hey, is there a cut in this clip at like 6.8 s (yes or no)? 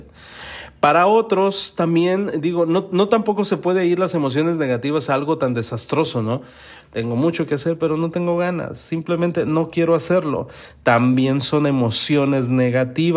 yes